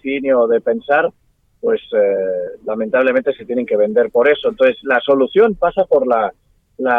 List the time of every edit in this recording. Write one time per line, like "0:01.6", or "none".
none